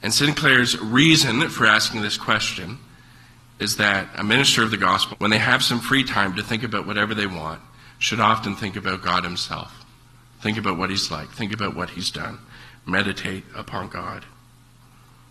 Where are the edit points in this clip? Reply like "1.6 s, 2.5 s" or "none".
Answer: 5.1 s